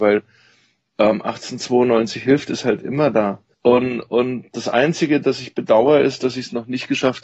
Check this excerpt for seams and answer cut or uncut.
cut